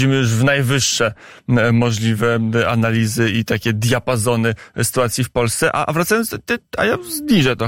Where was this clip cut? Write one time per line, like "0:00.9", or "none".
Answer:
none